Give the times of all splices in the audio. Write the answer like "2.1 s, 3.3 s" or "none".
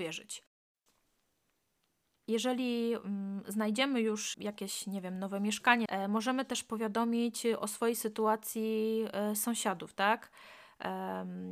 4.3 s, 5.9 s